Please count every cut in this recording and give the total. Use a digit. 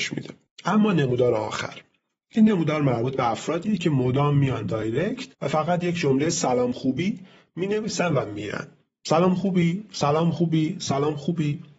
1